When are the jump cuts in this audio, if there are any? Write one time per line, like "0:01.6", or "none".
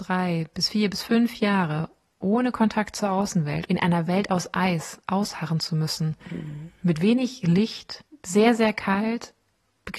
0:03.7